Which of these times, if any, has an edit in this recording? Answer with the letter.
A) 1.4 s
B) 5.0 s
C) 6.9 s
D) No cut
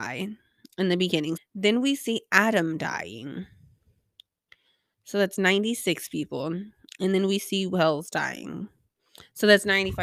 A